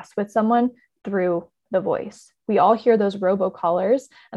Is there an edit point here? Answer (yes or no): no